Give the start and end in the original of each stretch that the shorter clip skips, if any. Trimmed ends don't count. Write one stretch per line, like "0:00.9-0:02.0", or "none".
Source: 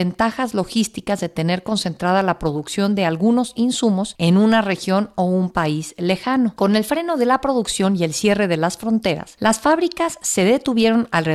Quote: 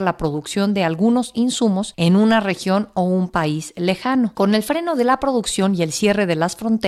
none